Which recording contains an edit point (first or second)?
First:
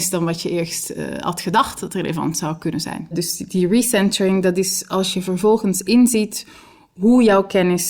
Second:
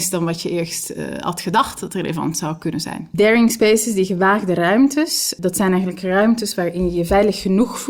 first